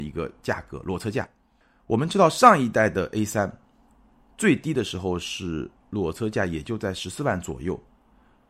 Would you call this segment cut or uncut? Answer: uncut